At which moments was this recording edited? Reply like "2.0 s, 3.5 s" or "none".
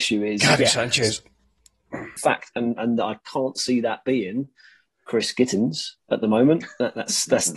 2.2 s